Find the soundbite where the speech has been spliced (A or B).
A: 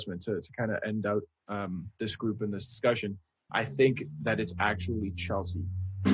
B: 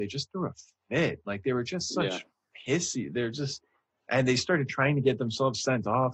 A